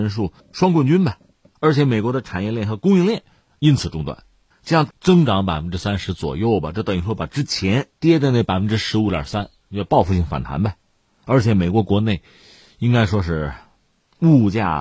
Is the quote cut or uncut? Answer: cut